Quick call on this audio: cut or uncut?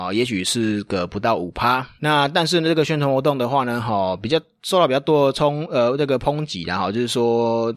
cut